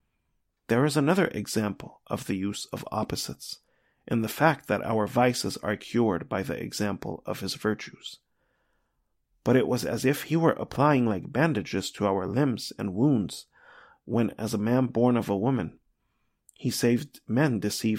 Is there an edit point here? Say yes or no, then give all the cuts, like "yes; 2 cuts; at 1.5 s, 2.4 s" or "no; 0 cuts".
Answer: no; 0 cuts